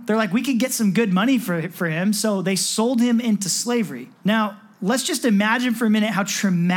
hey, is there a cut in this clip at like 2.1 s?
no; 1 cut; at 4.2 s

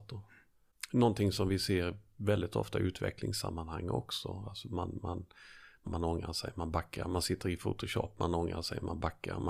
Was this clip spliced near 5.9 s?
yes; 1 cut; at 5.9 s

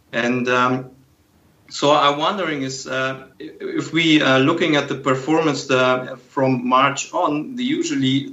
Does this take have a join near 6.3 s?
no; 1 cut; at 3.3 s

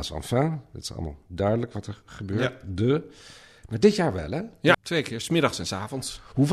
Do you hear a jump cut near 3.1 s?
no; 1 cut; at 4.7 s

